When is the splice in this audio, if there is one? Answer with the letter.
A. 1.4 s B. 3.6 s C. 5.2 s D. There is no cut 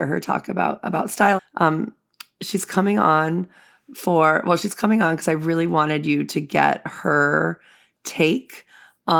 A